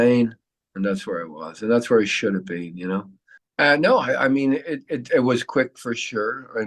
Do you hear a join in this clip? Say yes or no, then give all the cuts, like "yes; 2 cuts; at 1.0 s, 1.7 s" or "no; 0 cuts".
yes; 1 cut; at 3.4 s